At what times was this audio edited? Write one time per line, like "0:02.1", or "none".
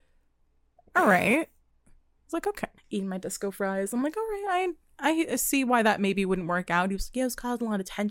0:02.8